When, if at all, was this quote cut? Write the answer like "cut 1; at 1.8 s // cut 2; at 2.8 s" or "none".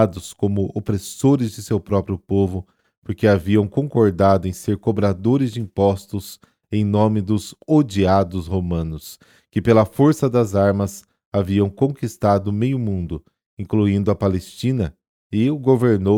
none